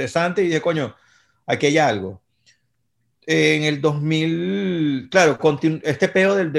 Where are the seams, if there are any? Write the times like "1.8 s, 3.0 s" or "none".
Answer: none